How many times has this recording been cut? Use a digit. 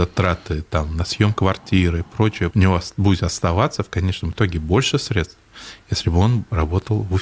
1